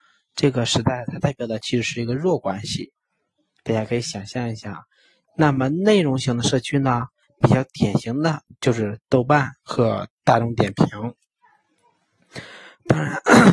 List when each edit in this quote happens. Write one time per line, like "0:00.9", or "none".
0:05.2